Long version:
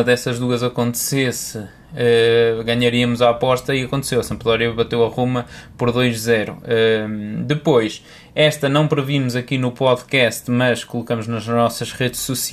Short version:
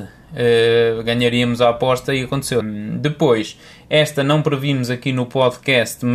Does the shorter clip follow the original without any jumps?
no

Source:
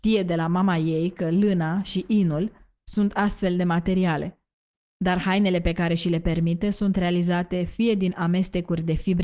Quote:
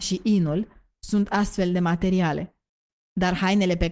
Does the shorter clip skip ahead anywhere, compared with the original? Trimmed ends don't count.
no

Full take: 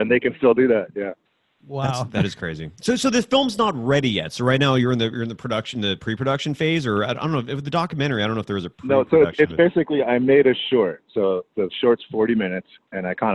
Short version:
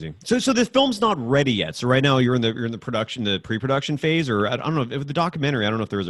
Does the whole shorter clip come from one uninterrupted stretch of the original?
yes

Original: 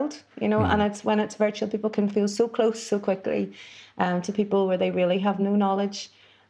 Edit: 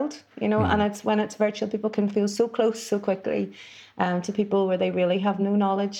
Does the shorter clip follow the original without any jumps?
yes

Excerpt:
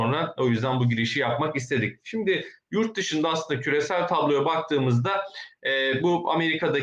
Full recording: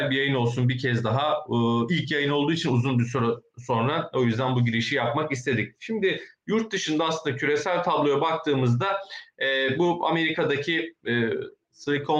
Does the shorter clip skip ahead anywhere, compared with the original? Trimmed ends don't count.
no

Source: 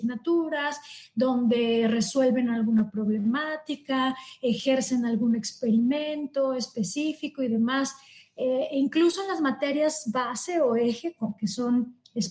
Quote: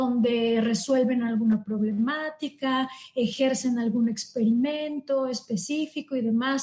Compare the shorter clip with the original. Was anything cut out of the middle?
no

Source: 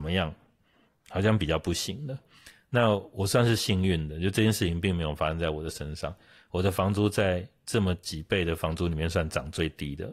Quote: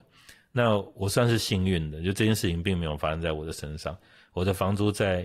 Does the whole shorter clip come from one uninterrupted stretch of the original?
yes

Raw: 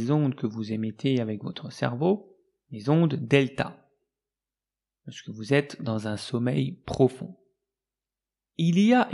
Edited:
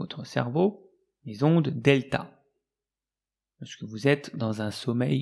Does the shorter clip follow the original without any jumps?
yes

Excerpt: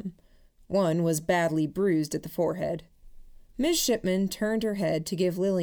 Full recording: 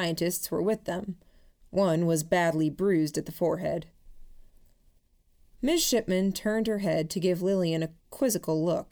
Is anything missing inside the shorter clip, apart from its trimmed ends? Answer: yes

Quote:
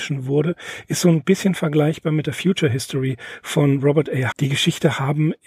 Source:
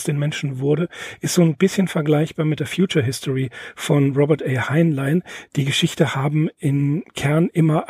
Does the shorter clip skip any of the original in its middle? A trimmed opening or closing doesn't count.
yes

